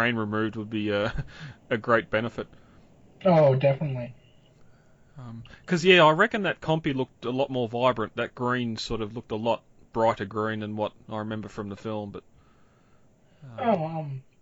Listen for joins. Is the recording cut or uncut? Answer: uncut